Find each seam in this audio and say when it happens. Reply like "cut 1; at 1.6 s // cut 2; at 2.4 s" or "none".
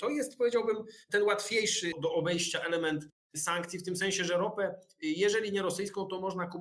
none